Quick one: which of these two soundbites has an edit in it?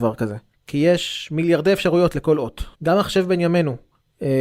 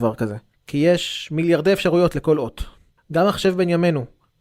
first; 1 cut; at 2.7 s

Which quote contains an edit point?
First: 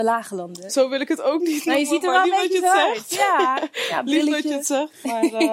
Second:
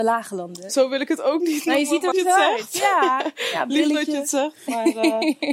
second; 1 cut; at 2.1 s

